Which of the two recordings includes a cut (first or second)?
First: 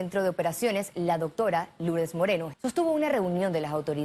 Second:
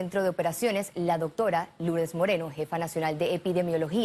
first